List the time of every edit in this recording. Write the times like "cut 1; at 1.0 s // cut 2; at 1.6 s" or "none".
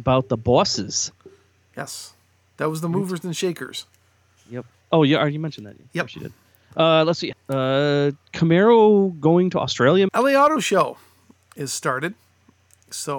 cut 1; at 7.3 s // cut 2; at 10.1 s

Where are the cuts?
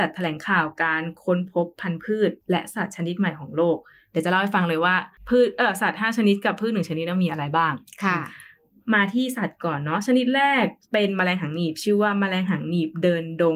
cut 1; at 10.8 s

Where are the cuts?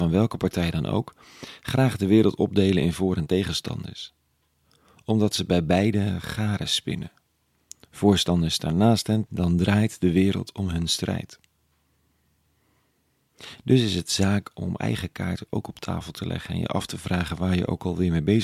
cut 1; at 9.3 s

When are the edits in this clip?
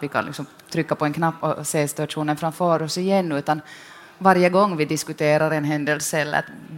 cut 1; at 1.4 s

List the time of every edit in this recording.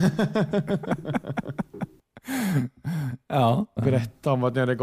cut 1; at 3.8 s

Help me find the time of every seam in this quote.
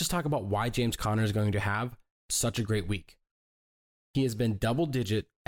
none

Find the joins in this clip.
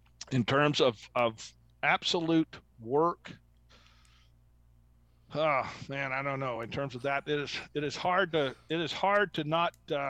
none

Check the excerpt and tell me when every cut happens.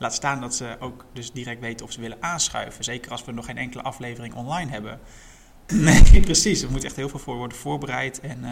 cut 1; at 5.7 s

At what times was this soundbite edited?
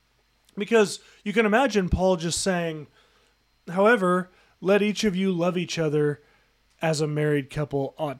none

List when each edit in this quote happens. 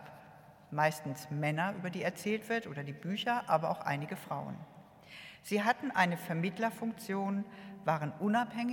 none

